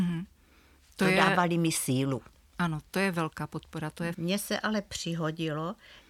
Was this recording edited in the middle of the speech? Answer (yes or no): yes